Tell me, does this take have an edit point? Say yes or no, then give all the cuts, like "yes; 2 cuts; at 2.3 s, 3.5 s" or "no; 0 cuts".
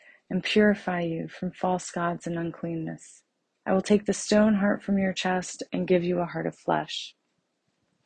yes; 1 cut; at 3.6 s